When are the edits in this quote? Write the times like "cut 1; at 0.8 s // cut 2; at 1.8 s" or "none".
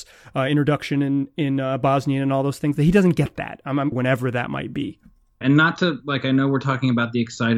cut 1; at 3.9 s // cut 2; at 5.4 s